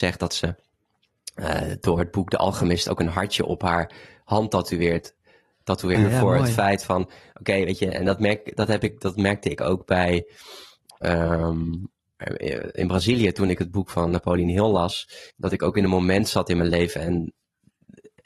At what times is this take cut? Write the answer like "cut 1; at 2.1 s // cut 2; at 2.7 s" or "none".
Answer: cut 1; at 6.0 s // cut 2; at 15.3 s